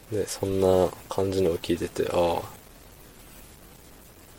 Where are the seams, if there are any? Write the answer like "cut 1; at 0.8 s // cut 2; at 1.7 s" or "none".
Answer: none